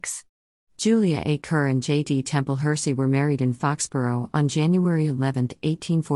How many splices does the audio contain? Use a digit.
0